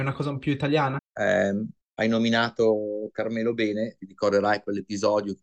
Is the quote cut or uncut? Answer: cut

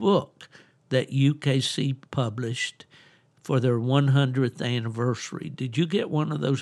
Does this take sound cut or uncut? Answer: cut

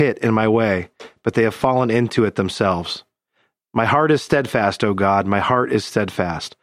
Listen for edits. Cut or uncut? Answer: uncut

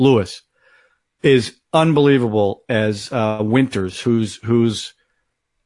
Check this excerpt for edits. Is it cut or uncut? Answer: uncut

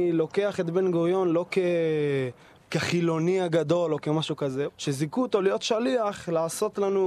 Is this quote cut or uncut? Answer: cut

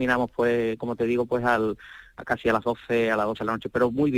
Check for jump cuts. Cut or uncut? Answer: uncut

